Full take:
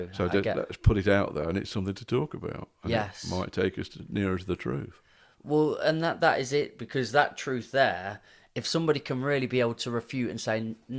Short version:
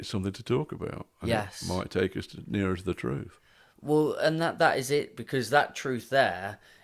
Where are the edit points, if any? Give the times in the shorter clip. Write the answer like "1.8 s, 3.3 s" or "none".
none